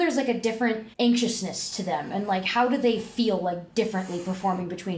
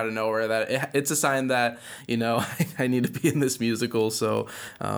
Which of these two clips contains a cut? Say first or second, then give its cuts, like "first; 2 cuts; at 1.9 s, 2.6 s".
first; 1 cut; at 0.9 s